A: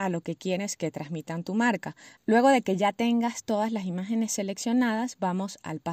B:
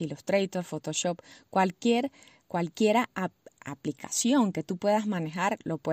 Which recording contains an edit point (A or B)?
A